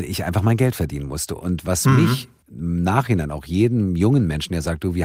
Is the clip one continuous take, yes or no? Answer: yes